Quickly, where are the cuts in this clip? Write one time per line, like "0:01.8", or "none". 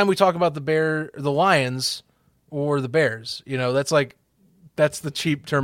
none